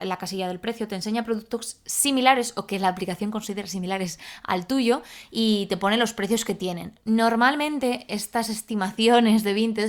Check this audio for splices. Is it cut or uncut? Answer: uncut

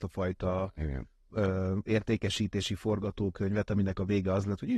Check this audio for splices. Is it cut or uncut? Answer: uncut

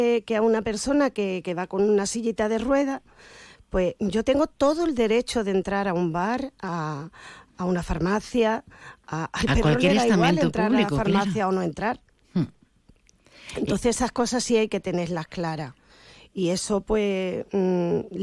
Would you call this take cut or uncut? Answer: uncut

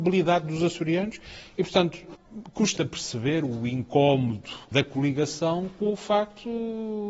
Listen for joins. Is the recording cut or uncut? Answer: cut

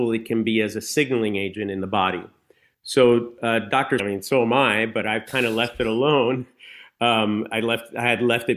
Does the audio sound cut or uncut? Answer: cut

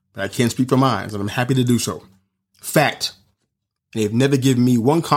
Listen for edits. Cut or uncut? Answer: cut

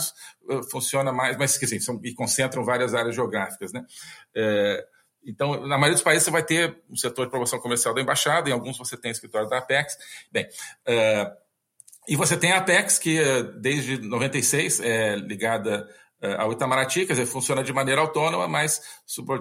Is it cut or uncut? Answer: cut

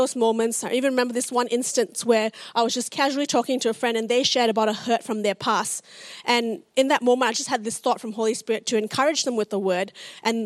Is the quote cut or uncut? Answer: uncut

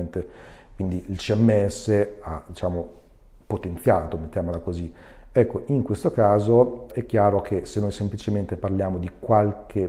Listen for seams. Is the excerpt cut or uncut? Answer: cut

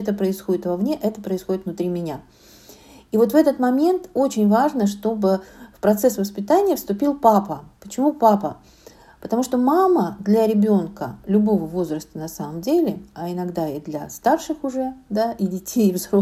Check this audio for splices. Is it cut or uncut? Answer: uncut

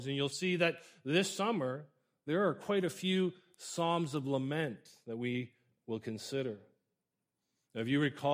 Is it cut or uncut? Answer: uncut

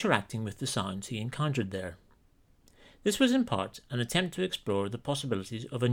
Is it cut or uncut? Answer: uncut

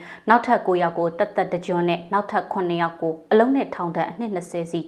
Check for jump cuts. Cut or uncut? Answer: uncut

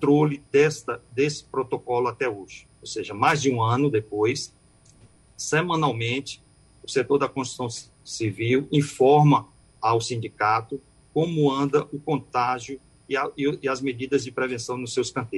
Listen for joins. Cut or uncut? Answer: uncut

